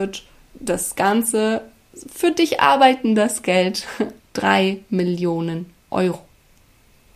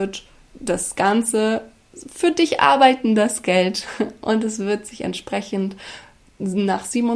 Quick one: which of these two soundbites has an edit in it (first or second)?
first